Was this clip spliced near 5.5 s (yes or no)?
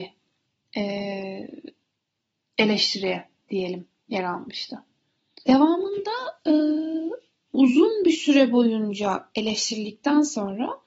yes